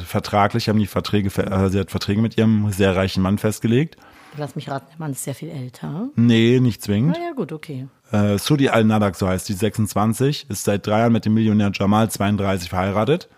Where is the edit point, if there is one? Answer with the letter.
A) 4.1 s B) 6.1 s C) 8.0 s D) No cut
C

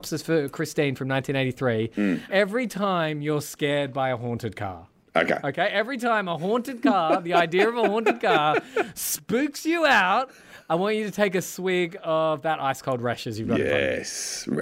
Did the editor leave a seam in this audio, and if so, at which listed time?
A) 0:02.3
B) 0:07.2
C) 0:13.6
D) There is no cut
A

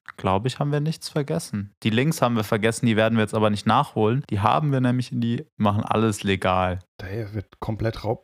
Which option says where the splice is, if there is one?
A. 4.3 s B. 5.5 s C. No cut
B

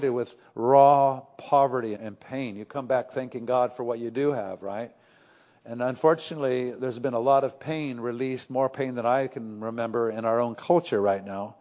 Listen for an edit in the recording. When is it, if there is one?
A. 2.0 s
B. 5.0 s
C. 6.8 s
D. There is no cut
A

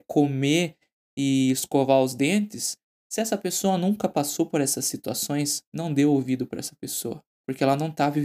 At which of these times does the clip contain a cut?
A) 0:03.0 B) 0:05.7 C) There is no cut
C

